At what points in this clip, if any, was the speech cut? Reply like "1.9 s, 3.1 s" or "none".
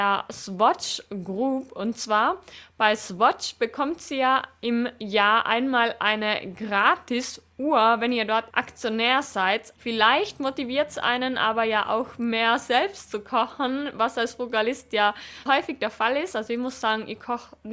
8.5 s, 9.8 s, 15.5 s